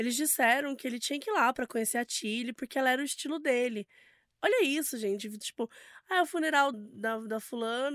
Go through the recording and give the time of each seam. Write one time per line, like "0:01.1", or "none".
0:05.4
0:06.7